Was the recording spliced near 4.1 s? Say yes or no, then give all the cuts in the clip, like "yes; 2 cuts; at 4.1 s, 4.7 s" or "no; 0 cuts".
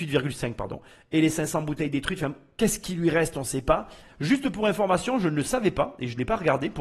yes; 1 cut; at 4.1 s